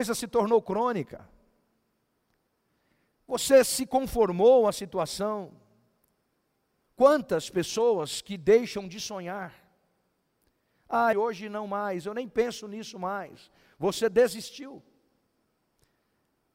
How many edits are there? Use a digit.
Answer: 1